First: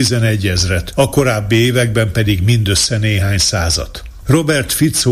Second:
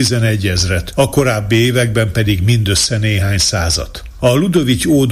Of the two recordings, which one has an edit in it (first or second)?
first